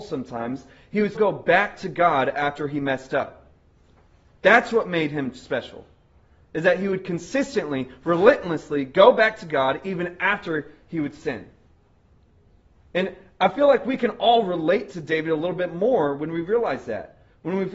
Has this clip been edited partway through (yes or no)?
yes